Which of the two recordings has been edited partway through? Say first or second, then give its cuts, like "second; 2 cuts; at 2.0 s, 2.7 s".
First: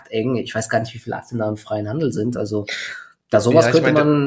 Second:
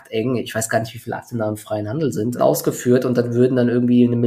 second; 1 cut; at 2.4 s